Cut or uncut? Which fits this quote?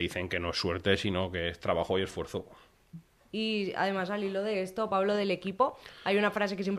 uncut